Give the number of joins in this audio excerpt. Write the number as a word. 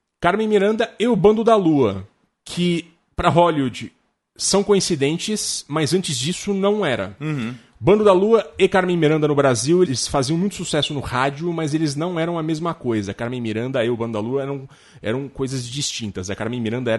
one